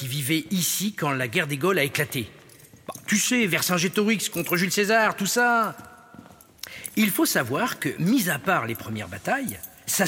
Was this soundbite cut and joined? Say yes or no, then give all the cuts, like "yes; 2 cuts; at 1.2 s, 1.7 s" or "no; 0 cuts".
no; 0 cuts